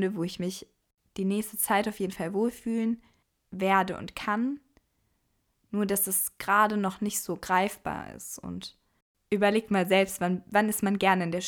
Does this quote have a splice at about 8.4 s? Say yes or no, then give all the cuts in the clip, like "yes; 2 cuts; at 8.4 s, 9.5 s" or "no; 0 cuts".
no; 0 cuts